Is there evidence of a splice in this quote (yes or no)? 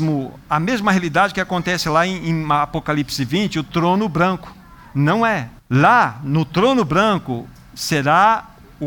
yes